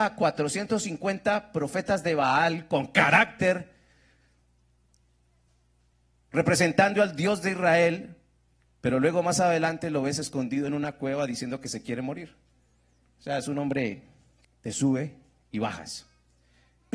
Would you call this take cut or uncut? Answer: uncut